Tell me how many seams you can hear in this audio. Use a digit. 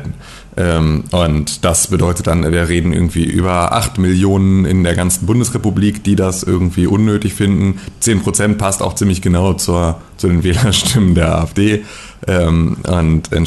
0